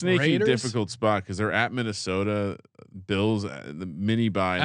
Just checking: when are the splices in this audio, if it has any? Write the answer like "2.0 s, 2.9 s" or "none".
none